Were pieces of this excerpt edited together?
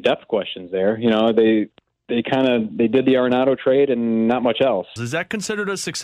yes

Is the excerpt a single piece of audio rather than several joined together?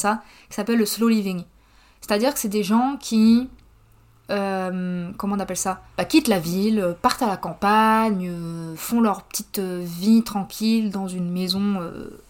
no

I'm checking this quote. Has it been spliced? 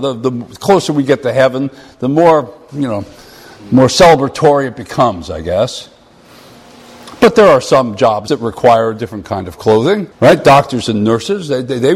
yes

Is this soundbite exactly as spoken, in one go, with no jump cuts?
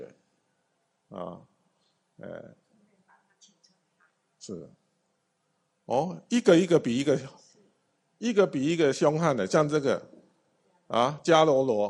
yes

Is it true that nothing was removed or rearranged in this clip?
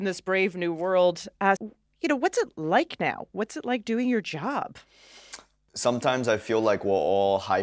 no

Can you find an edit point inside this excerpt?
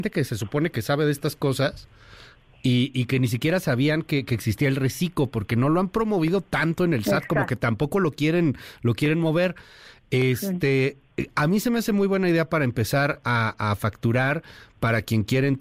no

